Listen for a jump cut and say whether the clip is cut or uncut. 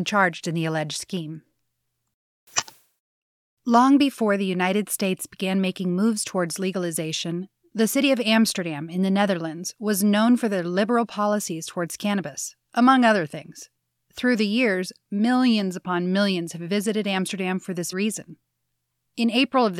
cut